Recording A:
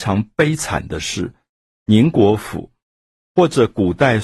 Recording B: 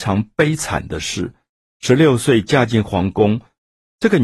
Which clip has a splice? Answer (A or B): A